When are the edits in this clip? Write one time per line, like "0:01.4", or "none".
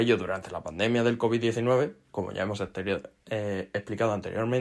0:02.1